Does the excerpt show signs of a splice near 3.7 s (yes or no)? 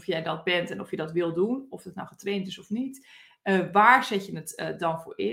no